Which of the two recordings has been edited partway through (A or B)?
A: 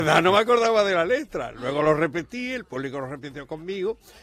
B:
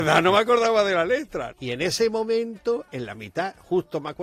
B